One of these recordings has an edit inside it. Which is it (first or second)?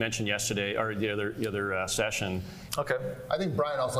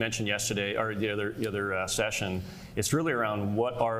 first